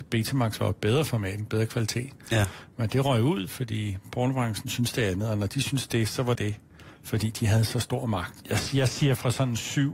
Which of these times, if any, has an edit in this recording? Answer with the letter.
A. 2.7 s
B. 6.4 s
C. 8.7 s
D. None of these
B